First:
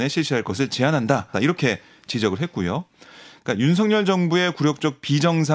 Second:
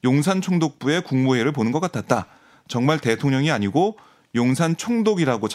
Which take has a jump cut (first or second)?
first